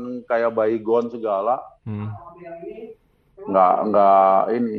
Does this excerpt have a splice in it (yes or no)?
yes